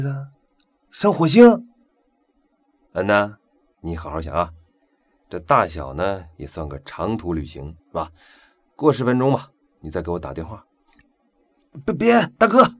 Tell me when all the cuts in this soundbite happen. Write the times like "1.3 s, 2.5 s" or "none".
4.2 s, 7.8 s, 9.8 s

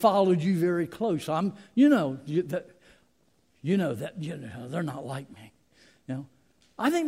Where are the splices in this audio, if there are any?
none

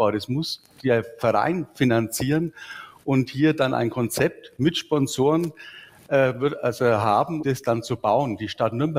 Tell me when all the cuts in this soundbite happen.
7.4 s

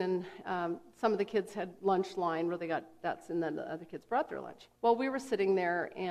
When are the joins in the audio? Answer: 4.8 s

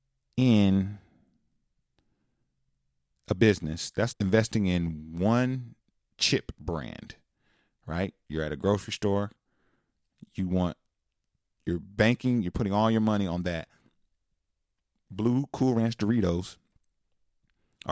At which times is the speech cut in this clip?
4.1 s

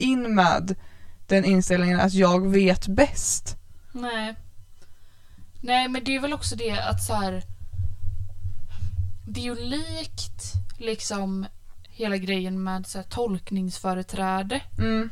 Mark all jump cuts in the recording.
11.9 s

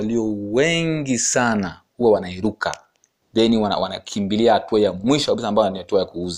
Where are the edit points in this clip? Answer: none

